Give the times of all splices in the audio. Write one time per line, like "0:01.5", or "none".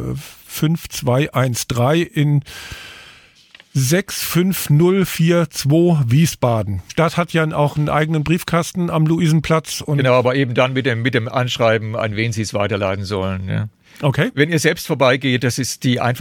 0:06.9